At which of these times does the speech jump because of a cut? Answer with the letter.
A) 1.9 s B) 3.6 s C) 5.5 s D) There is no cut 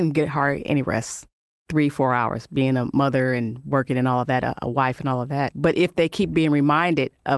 C